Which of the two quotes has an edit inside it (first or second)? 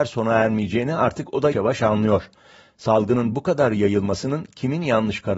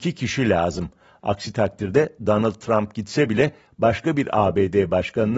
first